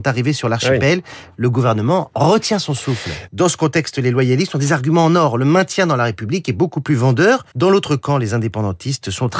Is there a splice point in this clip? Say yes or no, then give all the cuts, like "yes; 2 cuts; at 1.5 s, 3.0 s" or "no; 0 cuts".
yes; 2 cuts; at 3.3 s, 7.5 s